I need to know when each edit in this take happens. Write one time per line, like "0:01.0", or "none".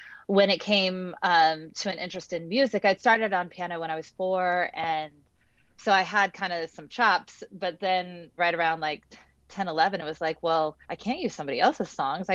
0:08.4
0:10.8